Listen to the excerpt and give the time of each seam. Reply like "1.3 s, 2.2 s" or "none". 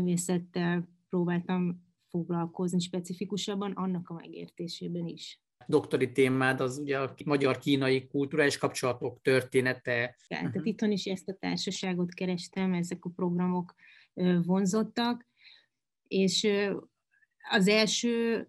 10.3 s